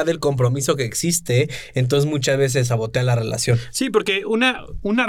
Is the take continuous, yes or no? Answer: yes